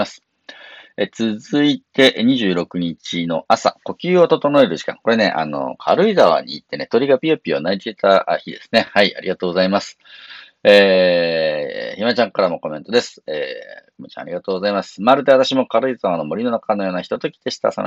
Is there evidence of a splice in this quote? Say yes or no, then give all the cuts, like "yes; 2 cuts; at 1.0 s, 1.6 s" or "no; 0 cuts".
no; 0 cuts